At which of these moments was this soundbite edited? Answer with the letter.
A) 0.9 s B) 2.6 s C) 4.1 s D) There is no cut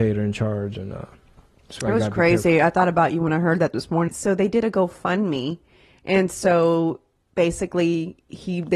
C